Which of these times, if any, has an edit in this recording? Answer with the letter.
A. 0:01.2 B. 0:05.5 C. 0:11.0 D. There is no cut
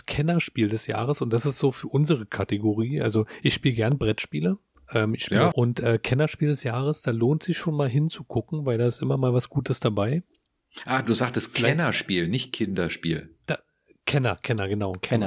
B